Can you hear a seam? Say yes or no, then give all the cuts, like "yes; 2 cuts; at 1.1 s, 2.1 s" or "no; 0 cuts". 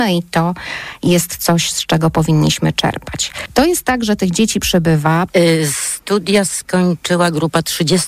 yes; 2 cuts; at 3.5 s, 5.3 s